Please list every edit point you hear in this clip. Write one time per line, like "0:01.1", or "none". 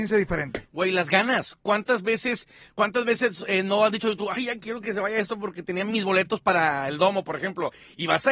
none